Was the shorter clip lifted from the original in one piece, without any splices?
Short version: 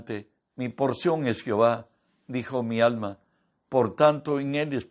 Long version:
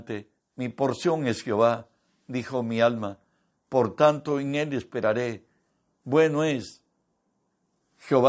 yes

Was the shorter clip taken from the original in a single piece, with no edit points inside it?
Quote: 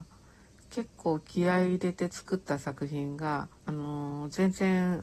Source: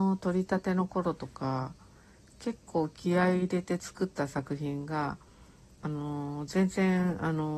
no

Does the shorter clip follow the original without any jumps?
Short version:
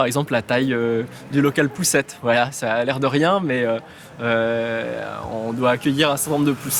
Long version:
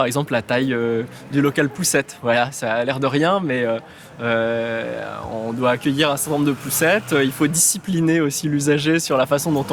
yes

